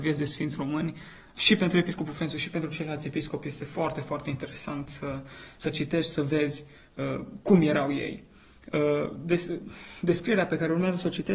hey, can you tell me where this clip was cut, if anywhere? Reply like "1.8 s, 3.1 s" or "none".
1.3 s